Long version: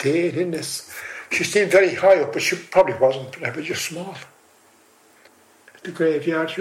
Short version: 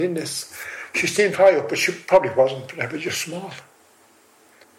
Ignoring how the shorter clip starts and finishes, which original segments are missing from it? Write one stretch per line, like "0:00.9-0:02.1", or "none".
0:01.7-0:02.0

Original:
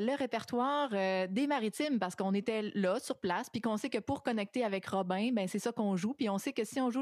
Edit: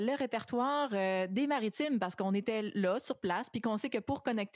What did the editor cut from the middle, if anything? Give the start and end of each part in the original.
none

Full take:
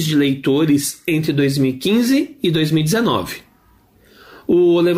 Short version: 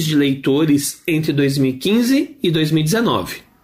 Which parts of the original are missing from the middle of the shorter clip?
none

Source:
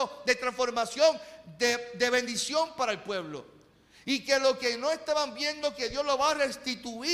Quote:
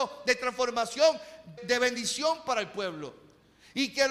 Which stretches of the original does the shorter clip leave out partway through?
0:01.6-0:01.9

